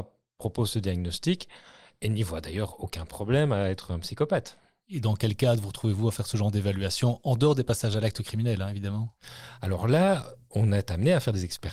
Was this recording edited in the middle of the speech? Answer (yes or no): no